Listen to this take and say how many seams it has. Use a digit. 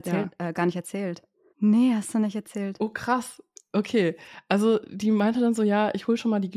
1